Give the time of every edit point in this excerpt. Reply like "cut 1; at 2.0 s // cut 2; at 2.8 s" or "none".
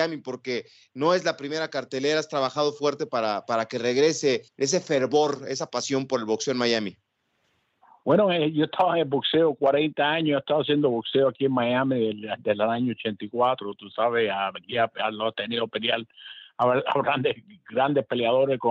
cut 1; at 4.5 s